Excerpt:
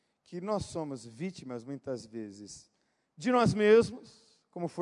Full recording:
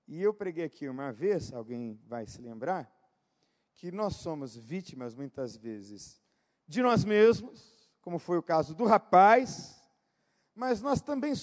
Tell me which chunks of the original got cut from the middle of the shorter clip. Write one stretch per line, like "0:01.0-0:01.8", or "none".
none